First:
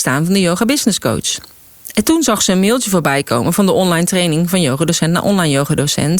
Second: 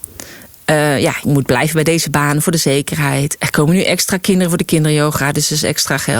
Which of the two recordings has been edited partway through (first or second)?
second